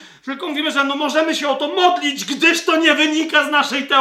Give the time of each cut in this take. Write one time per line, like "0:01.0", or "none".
none